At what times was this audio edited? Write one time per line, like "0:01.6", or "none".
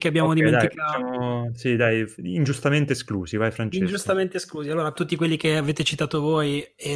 0:02.2
0:04.9